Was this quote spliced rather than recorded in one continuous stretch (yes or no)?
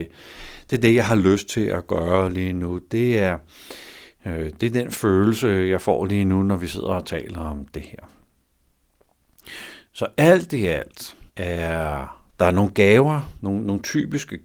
yes